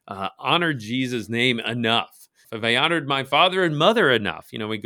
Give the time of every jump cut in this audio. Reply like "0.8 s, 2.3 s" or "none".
2.4 s